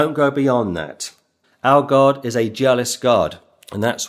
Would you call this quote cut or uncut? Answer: cut